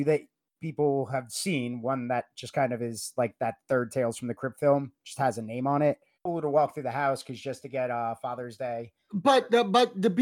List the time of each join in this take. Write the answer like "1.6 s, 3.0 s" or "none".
6.1 s